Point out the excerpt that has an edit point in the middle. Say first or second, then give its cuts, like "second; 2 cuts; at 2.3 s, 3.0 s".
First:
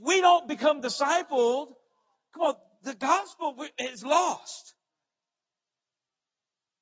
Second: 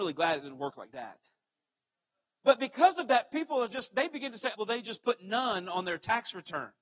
second; 1 cut; at 4.5 s